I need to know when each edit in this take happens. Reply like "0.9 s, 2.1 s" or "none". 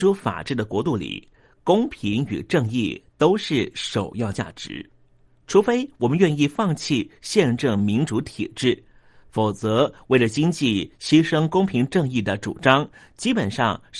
none